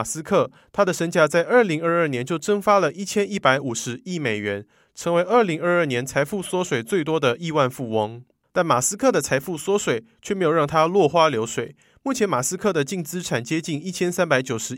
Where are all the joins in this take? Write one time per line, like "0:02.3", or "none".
0:08.5